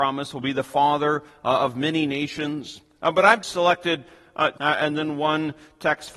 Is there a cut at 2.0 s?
no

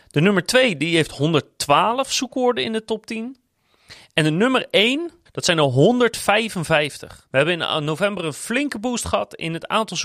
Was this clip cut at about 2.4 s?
no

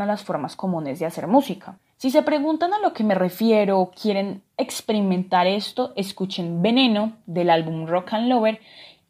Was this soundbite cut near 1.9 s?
yes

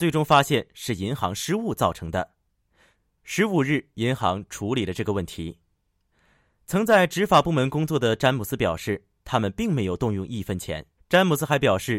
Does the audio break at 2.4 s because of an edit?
no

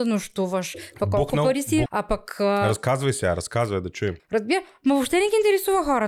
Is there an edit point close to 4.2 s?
yes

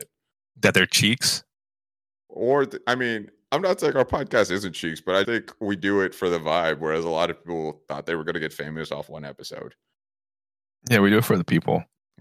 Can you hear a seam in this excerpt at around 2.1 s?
no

